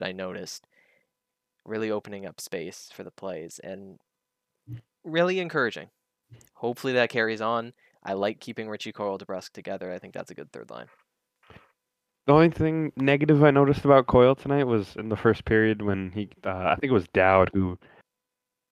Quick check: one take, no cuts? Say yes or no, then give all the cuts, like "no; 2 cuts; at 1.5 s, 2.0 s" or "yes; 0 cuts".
yes; 0 cuts